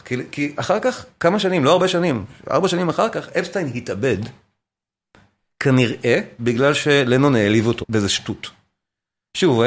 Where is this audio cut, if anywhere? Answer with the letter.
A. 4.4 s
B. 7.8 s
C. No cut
B